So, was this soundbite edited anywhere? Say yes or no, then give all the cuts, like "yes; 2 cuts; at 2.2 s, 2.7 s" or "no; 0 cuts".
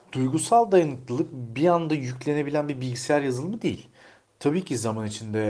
no; 0 cuts